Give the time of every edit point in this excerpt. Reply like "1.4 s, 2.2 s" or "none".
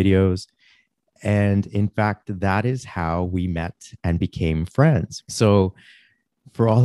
5.2 s

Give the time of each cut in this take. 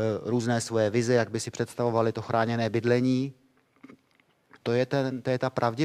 4.6 s

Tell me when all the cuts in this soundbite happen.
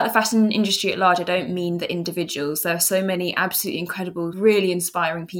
4.3 s

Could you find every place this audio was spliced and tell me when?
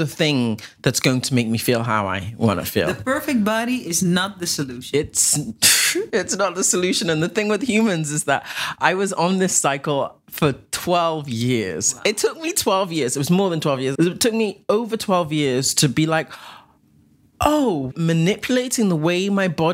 13.9 s, 17.9 s

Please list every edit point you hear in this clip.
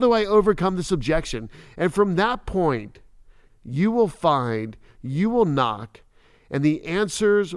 3.5 s

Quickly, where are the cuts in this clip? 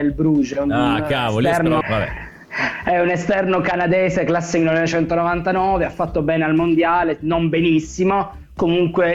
1.8 s

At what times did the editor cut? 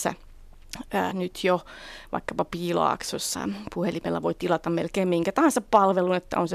1.1 s, 3.3 s

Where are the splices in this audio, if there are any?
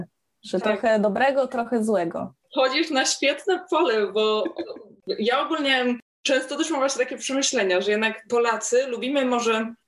2.4 s

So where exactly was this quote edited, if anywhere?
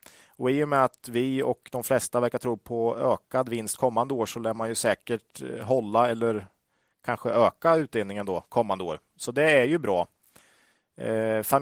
none

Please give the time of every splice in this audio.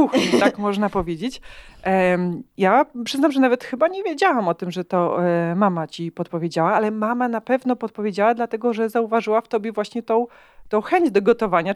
none

